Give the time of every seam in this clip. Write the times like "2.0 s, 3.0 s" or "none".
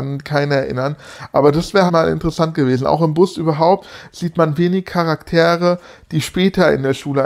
1.9 s